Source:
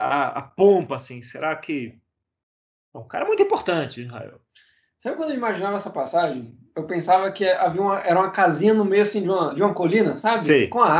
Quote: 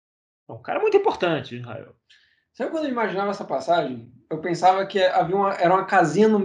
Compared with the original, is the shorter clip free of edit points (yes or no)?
yes